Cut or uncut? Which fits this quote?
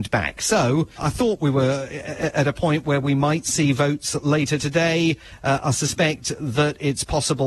cut